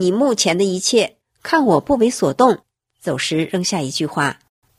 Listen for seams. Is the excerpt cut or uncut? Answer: cut